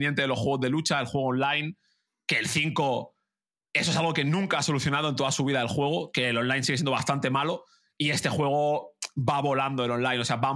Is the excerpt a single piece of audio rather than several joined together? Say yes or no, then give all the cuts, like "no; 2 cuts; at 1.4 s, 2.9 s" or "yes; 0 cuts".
yes; 0 cuts